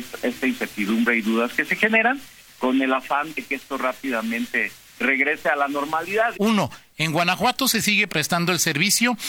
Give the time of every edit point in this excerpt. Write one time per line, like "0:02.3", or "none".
0:06.3
0:08.1